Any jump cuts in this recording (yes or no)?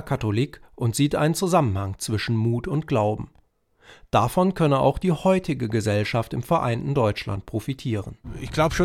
no